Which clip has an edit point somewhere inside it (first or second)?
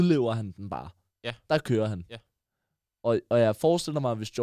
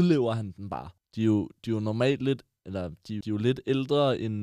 second